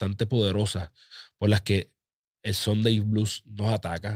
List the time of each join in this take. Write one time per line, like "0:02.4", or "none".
none